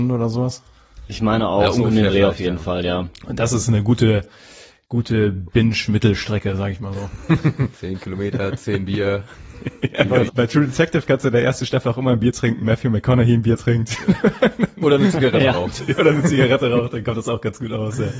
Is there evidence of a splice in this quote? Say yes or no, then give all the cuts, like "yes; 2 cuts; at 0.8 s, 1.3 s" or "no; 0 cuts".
yes; 3 cuts; at 7.7 s, 10.3 s, 12.6 s